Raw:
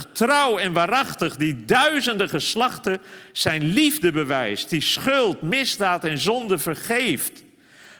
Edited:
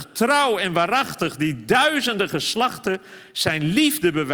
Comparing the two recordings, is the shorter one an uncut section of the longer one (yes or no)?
yes